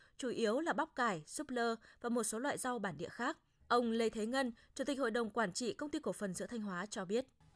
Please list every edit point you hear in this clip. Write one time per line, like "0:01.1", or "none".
0:03.6